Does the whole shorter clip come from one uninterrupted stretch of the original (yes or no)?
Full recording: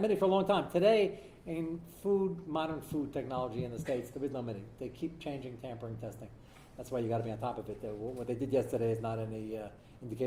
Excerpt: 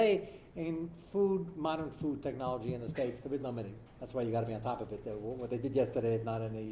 no